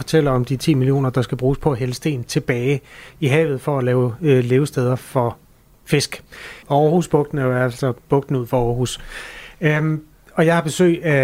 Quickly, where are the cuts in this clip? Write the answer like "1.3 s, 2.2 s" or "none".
6.6 s